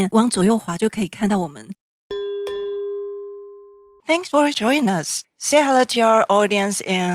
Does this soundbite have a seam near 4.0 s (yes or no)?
yes